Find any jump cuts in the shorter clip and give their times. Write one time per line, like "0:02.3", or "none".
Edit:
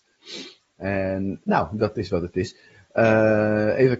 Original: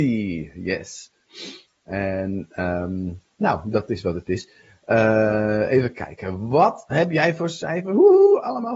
0:01.4